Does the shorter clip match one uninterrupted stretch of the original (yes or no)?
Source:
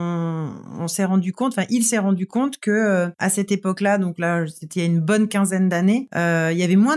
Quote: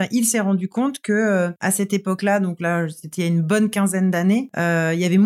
yes